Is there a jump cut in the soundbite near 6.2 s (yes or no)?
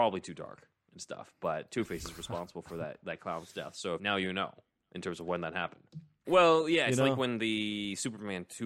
yes